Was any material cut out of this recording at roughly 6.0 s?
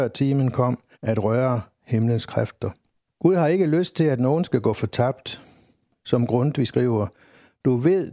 no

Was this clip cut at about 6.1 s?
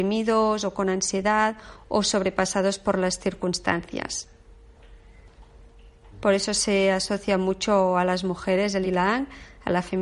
yes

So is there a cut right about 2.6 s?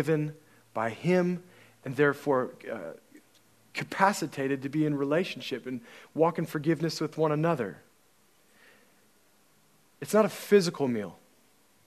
no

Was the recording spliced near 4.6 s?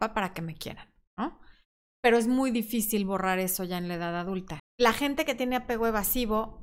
yes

